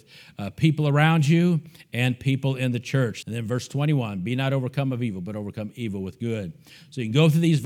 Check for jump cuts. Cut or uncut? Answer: cut